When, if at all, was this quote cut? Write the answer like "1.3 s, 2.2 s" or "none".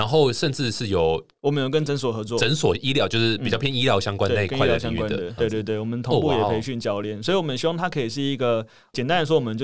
5.4 s

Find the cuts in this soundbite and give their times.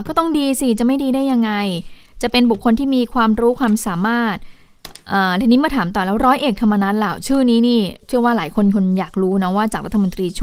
8.0 s

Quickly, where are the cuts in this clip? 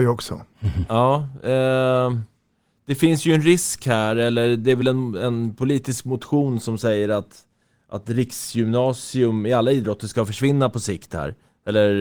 none

